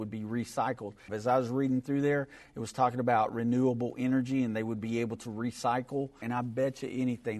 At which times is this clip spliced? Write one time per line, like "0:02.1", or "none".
0:01.1
0:06.2